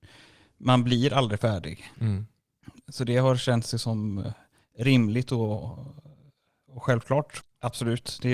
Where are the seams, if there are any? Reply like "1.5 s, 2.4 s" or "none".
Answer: 1.9 s, 7.4 s